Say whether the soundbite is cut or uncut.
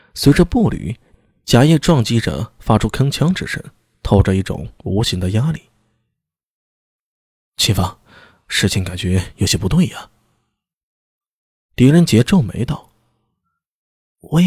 uncut